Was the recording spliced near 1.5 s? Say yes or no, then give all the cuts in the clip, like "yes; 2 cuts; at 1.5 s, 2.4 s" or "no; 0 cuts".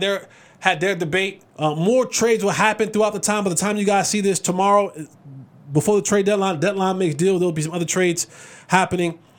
yes; 1 cut; at 1.5 s